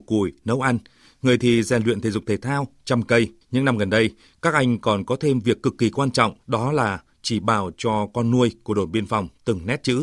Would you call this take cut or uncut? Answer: cut